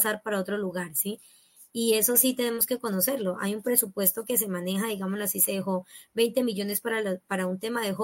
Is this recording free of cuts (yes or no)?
yes